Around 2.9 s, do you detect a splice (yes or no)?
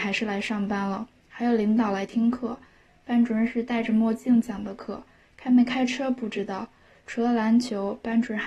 no